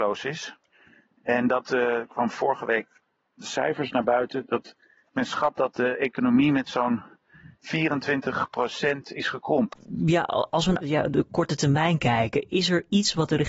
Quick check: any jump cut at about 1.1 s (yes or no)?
no